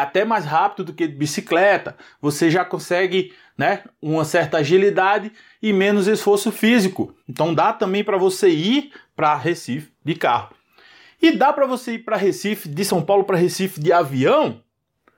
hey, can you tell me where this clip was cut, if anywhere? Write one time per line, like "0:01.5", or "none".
0:07.2

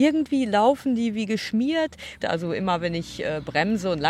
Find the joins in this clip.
0:02.2

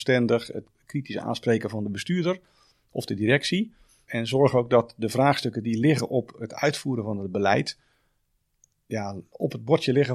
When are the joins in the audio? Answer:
none

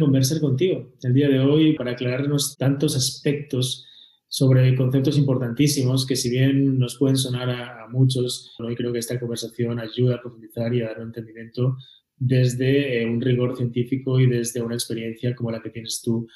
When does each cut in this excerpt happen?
0:01.8
0:08.6

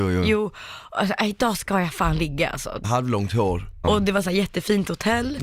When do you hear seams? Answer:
0:02.8
0:03.8

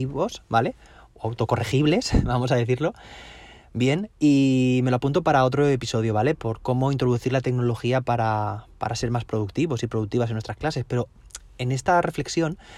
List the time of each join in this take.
none

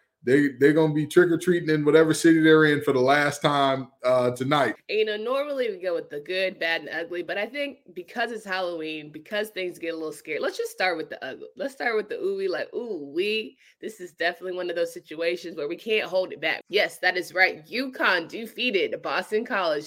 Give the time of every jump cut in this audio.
0:04.8
0:16.6

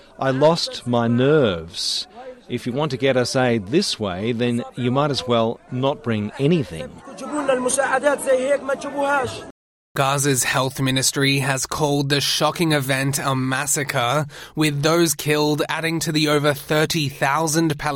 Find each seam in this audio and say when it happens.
none

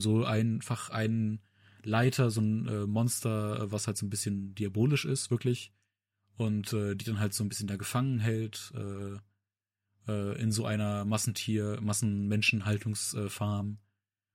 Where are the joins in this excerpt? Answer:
none

